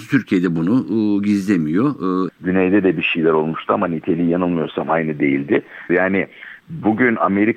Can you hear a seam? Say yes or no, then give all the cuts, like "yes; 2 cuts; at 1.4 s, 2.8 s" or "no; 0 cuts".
yes; 2 cuts; at 2.3 s, 5.9 s